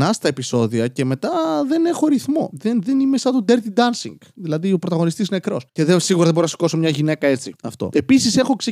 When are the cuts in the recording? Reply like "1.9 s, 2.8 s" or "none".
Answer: 5.7 s, 7.6 s